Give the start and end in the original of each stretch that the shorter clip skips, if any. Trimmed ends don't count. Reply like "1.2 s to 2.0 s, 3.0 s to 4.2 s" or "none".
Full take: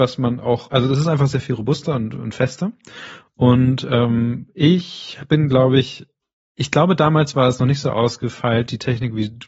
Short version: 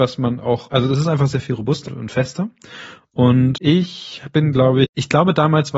1.9 s to 2.1 s, 3.8 s to 4.5 s, 5.8 s to 6.5 s